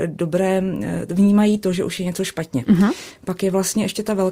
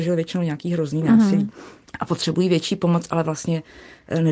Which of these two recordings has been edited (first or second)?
second